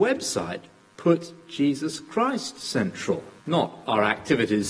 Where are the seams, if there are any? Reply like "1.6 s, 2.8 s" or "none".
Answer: 3.4 s